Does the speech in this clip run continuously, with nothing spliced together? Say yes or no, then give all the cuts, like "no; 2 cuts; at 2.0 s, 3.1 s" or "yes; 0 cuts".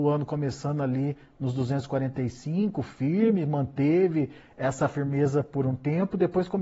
yes; 0 cuts